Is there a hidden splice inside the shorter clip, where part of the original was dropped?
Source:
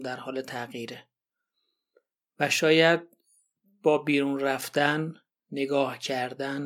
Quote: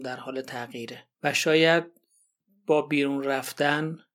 yes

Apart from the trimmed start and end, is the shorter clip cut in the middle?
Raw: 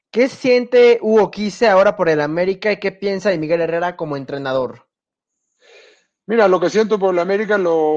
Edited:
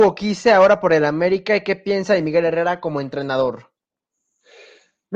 no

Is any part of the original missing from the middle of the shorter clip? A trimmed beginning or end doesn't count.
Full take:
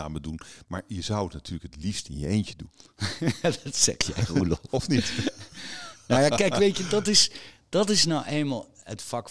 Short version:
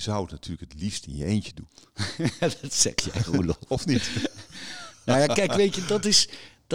no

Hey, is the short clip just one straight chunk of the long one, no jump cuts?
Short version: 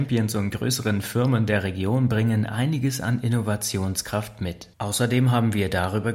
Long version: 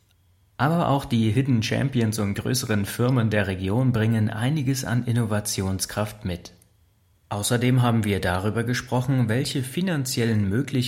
no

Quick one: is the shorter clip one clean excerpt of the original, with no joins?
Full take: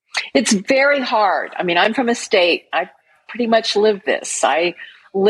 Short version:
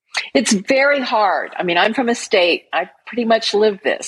no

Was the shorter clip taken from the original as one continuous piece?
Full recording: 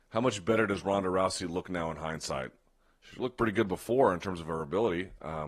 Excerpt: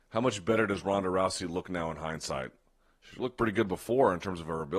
yes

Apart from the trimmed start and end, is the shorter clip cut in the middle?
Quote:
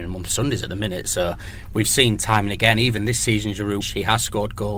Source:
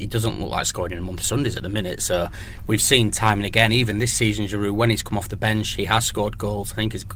yes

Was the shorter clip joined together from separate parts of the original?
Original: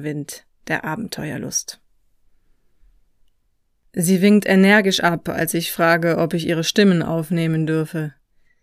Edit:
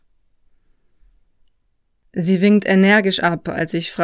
no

